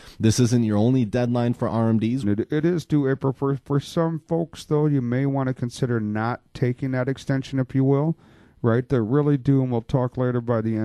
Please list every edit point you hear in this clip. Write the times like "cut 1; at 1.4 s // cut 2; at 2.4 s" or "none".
cut 1; at 2.2 s